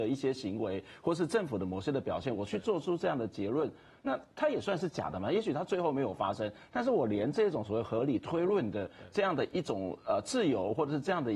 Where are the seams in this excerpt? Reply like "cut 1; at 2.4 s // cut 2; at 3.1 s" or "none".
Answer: none